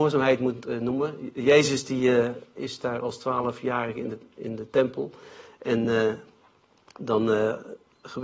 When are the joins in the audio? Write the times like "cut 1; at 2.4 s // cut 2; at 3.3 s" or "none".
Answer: none